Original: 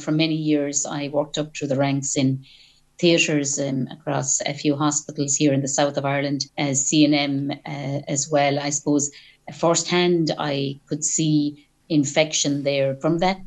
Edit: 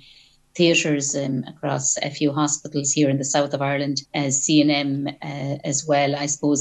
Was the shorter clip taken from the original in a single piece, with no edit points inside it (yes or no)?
yes